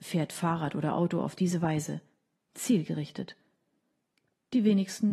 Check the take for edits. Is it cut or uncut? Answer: uncut